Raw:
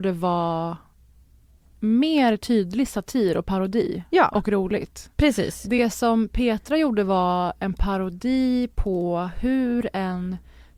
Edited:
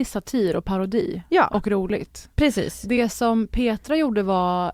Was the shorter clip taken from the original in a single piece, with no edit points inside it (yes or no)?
yes